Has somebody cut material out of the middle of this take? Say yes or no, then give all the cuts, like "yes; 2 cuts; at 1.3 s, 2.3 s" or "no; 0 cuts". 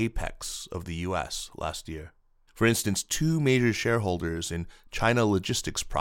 yes; 1 cut; at 2.5 s